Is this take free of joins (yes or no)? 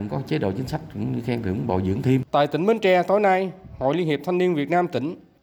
no